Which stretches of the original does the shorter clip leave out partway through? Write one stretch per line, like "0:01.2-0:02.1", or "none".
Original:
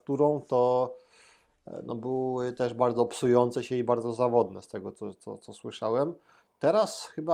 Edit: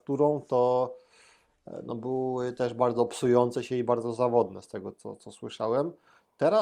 0:04.9-0:05.2